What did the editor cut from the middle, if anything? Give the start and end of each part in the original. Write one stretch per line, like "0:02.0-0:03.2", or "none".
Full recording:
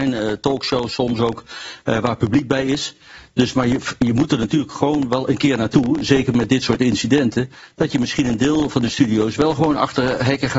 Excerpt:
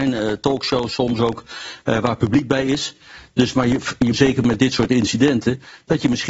0:04.1-0:06.0